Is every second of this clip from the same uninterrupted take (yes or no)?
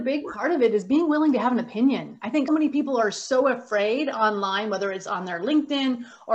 no